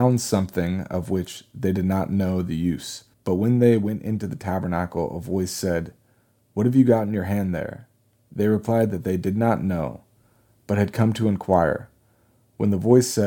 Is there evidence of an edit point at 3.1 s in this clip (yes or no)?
yes